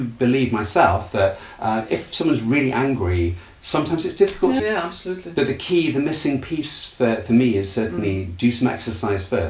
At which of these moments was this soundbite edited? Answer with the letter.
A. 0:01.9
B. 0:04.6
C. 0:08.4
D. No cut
B